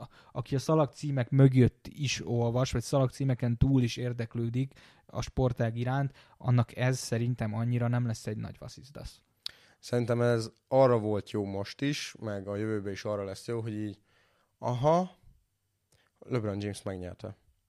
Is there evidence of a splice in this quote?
no; 0 cuts

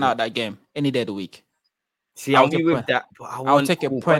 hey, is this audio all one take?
no; 1 cut; at 2.5 s

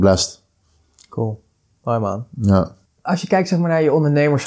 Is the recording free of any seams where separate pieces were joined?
yes; 0 cuts

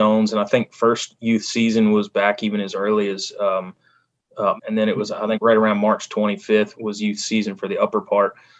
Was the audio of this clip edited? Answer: yes; 2 cuts; at 4.6 s, 6.7 s

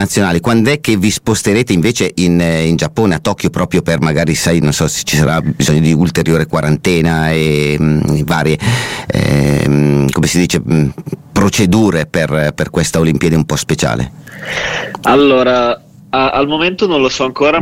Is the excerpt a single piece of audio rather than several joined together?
yes; 0 cuts

